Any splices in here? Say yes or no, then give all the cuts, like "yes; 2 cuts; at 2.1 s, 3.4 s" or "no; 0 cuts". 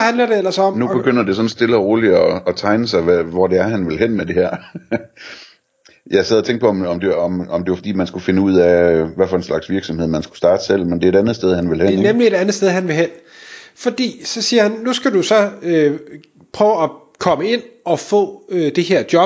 no; 0 cuts